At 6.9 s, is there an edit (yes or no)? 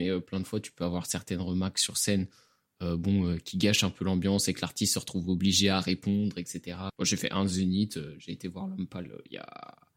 yes